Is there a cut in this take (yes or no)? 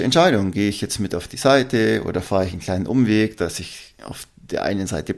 no